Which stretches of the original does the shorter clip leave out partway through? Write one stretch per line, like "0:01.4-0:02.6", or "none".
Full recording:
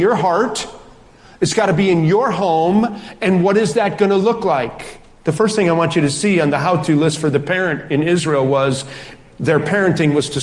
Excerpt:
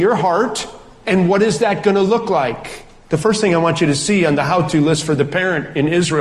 0:01.0-0:03.2